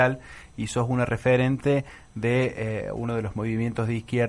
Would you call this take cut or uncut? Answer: uncut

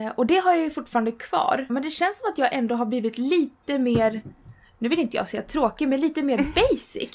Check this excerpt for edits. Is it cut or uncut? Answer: cut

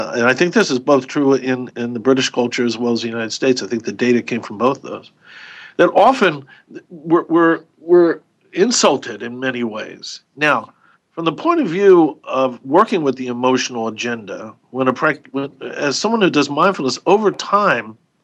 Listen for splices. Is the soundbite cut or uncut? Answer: cut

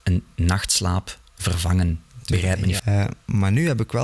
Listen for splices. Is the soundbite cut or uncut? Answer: cut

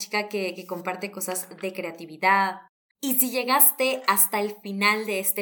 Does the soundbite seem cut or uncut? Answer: cut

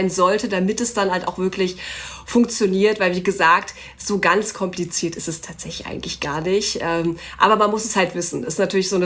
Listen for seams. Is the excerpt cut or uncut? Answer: uncut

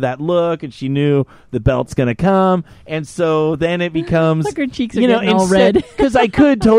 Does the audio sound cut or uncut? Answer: uncut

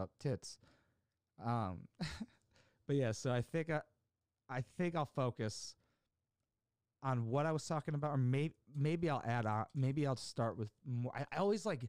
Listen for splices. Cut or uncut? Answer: uncut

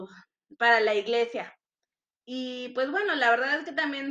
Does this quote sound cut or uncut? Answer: uncut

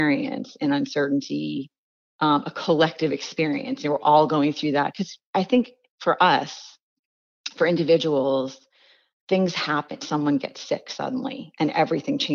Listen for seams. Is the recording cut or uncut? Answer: uncut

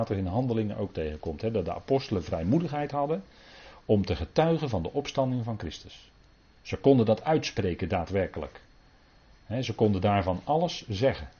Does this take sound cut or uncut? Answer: uncut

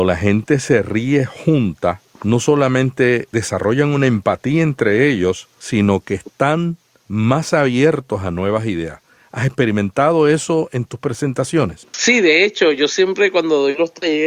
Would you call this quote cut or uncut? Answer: uncut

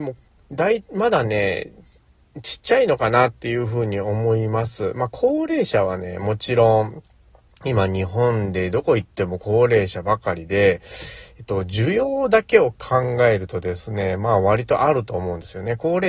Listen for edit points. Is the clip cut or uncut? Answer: uncut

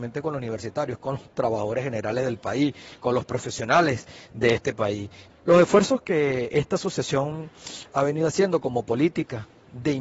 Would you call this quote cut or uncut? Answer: cut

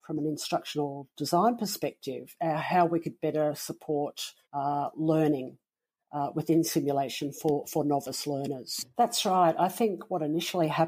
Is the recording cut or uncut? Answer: cut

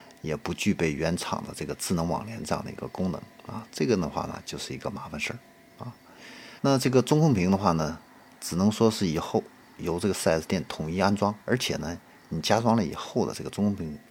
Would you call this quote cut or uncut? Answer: cut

